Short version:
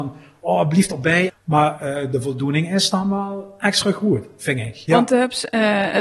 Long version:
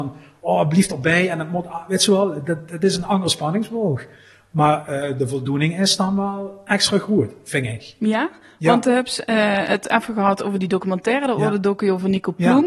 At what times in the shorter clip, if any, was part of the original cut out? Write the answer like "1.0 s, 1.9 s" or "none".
1.3 s, 4.9 s